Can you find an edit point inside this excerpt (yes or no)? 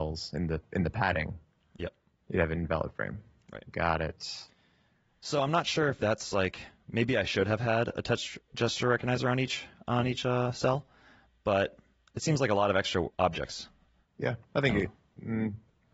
no